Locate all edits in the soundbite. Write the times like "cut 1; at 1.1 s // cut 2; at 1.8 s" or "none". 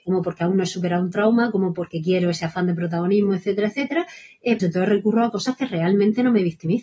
cut 1; at 4.6 s